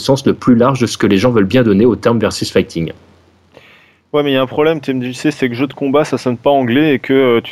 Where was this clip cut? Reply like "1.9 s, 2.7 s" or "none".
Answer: none